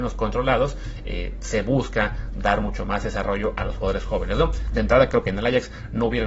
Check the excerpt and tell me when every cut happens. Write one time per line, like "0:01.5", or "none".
none